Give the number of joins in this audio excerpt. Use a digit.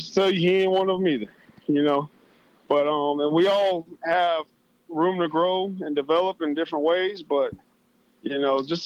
0